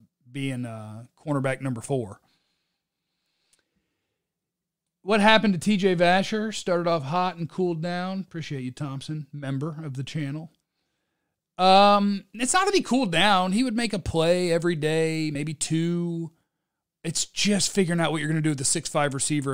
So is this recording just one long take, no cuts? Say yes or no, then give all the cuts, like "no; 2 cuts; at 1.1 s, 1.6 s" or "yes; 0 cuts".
yes; 0 cuts